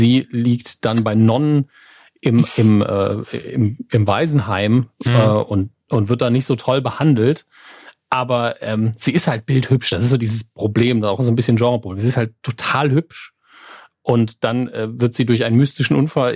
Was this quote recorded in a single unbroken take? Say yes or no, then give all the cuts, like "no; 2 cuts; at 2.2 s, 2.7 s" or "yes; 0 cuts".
yes; 0 cuts